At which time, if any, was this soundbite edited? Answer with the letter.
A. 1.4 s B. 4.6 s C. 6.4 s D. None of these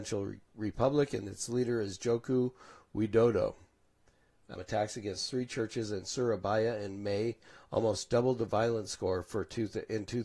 B